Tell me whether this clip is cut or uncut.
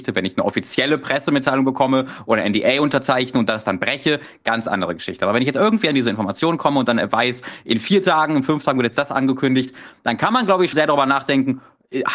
cut